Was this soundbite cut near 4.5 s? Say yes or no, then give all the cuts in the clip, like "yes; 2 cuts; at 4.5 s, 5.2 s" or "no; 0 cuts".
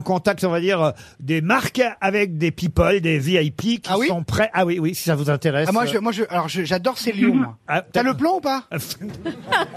no; 0 cuts